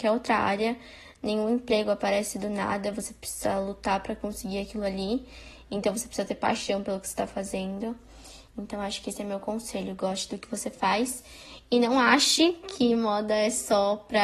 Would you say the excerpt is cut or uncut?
uncut